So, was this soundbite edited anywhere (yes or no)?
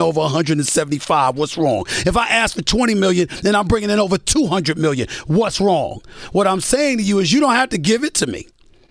no